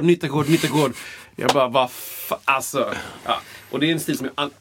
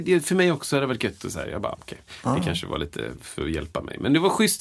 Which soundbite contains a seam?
second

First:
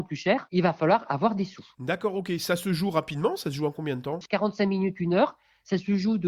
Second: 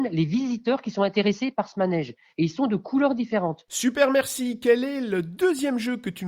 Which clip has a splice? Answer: second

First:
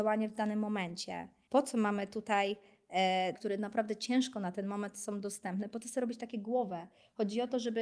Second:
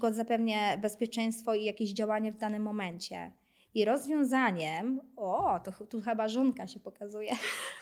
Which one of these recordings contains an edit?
first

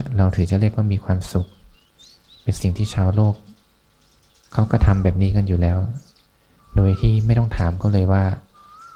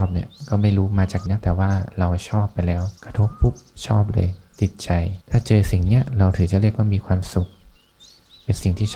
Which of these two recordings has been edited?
second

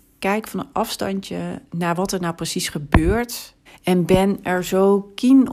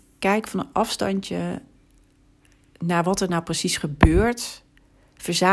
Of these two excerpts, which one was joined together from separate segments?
first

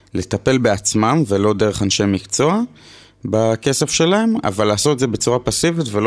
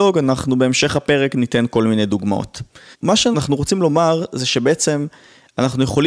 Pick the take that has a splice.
second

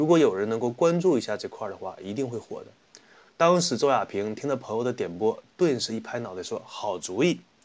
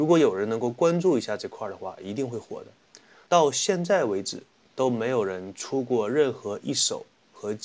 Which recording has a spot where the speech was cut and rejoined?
second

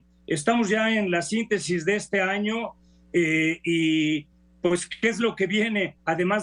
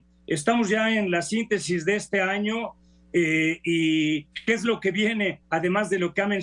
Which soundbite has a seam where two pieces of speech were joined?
second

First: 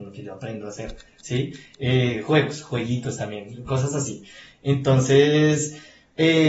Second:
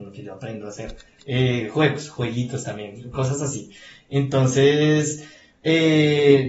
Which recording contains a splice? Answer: second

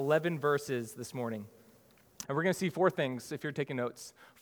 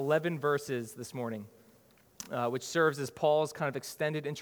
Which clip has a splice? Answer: first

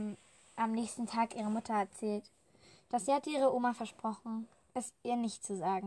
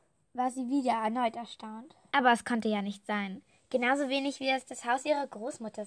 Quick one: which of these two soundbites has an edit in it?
second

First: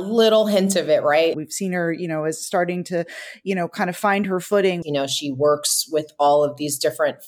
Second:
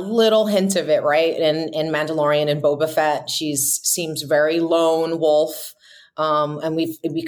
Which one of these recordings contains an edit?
first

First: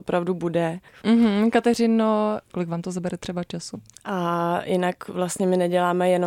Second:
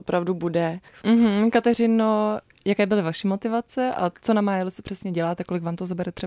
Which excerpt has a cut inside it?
first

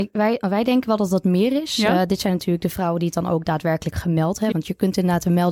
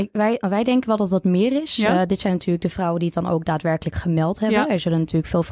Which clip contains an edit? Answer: first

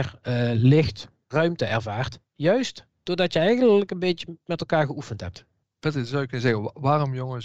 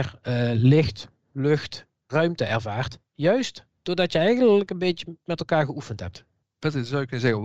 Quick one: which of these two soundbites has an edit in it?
first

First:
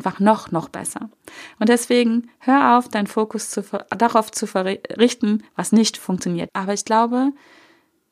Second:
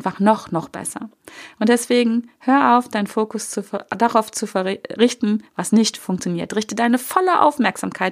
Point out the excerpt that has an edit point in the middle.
first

